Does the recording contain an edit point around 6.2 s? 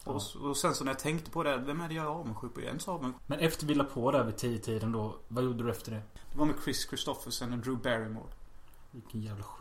yes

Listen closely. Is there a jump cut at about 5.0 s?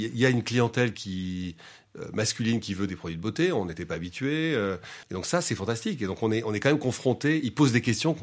yes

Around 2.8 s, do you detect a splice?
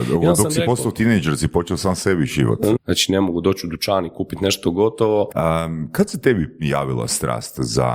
yes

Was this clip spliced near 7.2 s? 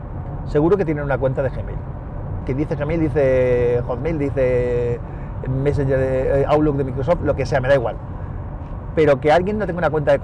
no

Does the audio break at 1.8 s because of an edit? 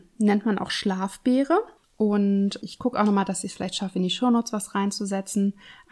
yes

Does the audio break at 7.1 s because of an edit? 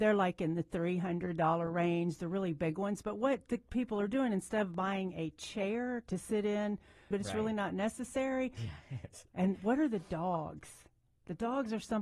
yes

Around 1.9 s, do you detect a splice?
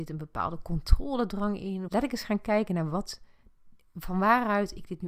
yes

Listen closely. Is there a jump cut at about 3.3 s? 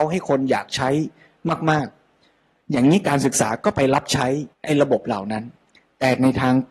no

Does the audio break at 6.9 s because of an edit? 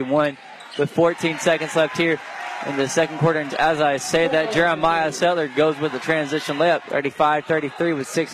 yes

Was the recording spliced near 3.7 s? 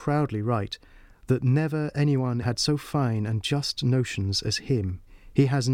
no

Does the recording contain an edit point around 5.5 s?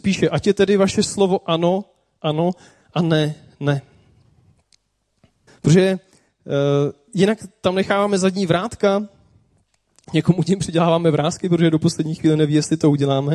yes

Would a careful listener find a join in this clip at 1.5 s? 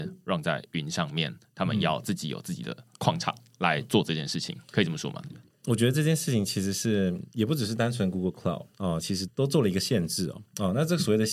no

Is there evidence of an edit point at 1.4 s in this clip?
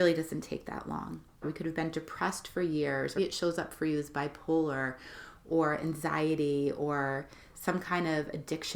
yes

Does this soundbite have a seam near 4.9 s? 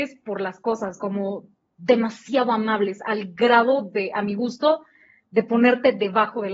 no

